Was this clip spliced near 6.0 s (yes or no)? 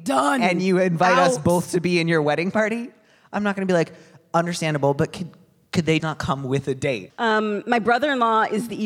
yes